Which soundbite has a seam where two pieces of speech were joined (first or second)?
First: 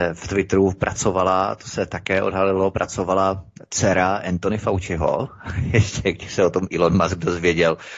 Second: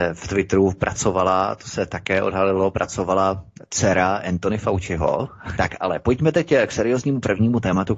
second